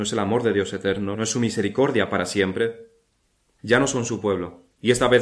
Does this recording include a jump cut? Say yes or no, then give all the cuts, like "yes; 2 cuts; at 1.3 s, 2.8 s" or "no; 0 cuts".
yes; 2 cuts; at 1.1 s, 3.6 s